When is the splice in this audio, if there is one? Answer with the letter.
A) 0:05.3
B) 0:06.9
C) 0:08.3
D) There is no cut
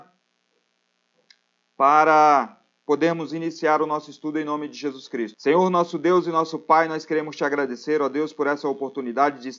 A